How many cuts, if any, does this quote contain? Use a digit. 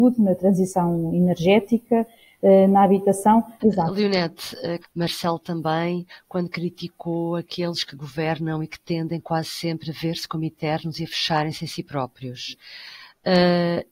2